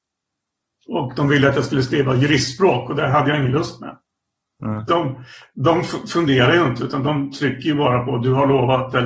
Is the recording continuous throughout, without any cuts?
no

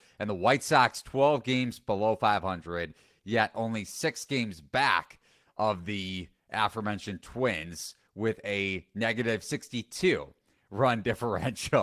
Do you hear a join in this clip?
no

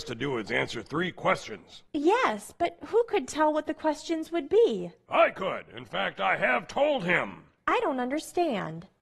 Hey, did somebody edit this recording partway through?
no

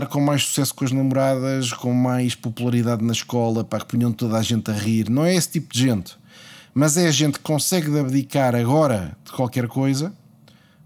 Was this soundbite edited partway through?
no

